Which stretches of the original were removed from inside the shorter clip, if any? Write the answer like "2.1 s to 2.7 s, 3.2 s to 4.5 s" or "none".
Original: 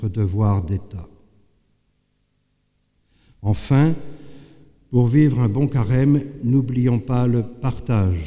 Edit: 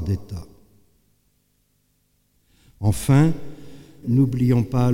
4.6 s to 6.4 s

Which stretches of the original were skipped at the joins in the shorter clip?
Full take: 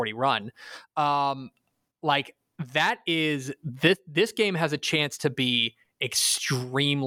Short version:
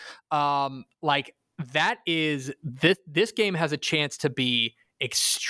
1.6 s to 1.9 s

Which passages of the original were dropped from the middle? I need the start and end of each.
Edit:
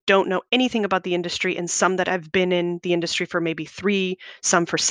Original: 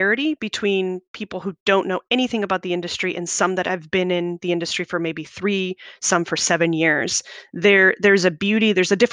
none

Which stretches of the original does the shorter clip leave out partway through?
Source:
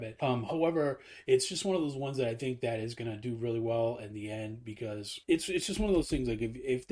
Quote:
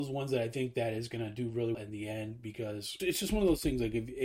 3.6 s to 4.0 s, 5.2 s to 5.5 s

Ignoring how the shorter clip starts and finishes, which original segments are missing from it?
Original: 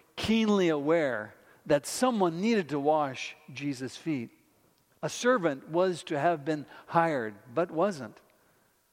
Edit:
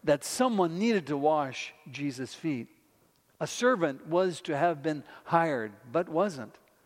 none

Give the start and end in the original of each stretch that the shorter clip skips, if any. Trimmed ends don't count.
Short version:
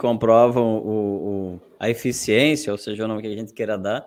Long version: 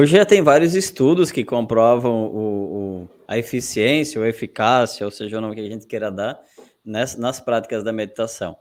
4.1 s to 5.0 s

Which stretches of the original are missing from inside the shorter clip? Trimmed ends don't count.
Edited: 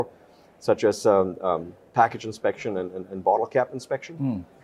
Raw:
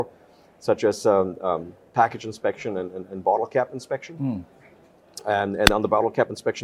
none

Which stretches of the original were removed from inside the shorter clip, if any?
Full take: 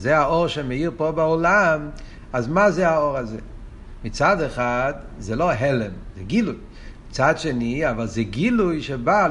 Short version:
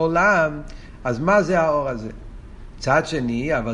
4.0 s to 7.0 s

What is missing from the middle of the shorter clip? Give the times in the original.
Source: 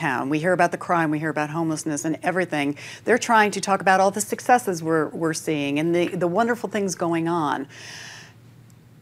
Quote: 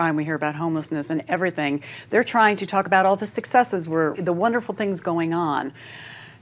5.1 s to 6.1 s

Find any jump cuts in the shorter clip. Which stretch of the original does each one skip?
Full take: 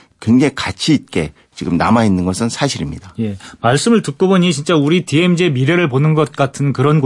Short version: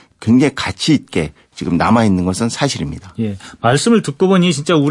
none

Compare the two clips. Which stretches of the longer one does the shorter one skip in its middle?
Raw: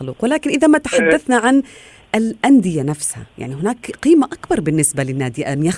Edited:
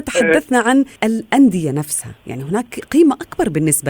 1.7 s to 2.1 s

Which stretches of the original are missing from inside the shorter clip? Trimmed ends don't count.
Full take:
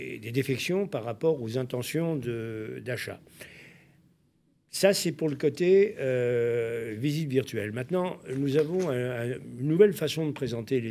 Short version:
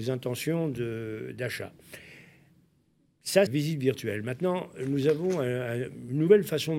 4.9 s to 7.0 s

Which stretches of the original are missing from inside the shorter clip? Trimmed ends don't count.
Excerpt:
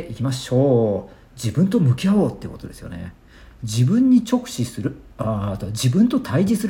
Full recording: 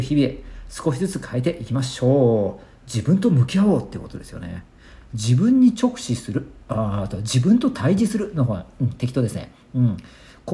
none

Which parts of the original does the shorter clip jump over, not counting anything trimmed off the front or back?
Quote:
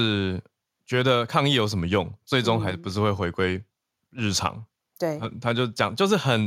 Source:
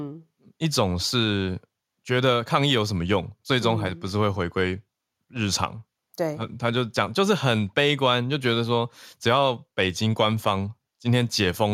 none

